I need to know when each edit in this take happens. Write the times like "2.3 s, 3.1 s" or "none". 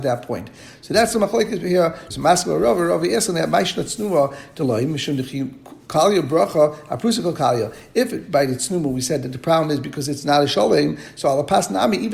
2.1 s